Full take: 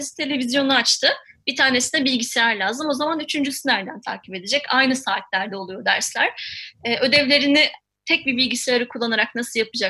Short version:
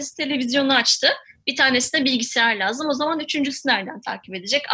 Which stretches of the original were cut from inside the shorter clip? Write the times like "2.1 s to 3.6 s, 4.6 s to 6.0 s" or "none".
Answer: none